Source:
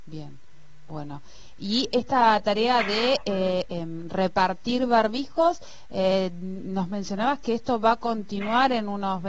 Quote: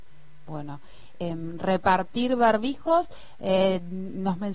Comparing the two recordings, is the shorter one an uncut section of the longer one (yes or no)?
no